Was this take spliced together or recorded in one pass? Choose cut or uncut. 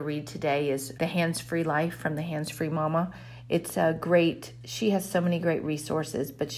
cut